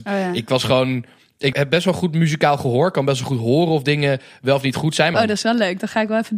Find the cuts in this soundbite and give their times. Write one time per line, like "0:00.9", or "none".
0:01.5
0:05.1